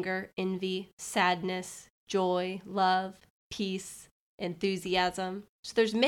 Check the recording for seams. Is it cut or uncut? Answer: cut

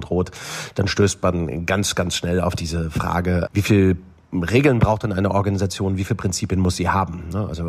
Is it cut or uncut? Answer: cut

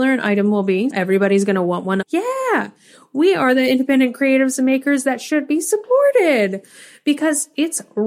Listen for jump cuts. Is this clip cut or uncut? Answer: cut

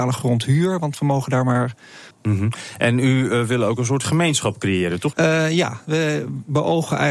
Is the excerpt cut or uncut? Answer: cut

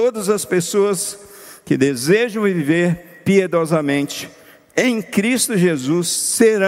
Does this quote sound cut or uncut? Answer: uncut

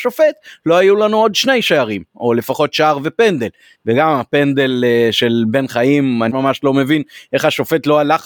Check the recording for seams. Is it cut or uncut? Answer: cut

